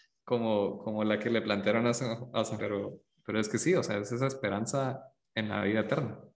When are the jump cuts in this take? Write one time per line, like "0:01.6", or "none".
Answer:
0:02.6